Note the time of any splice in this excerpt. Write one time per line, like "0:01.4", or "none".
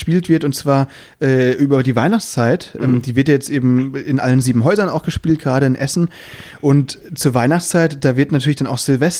none